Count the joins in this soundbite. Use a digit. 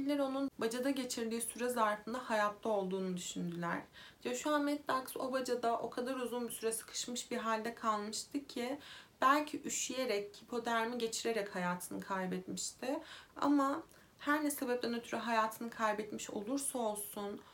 2